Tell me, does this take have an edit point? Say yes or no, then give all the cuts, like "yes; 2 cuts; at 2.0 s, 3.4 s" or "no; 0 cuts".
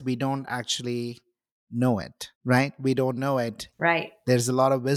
yes; 2 cuts; at 2.3 s, 3.7 s